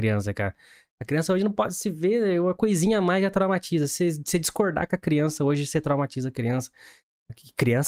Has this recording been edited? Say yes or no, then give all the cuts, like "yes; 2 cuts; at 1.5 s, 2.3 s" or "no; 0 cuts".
no; 0 cuts